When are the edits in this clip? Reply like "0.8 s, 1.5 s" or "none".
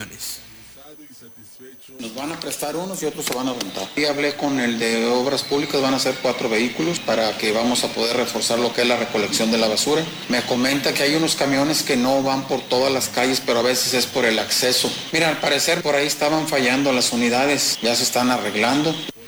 15.1 s